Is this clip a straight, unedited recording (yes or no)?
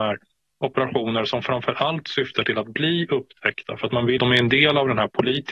no